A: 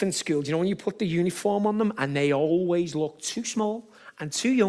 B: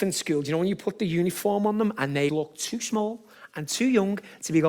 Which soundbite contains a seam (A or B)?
B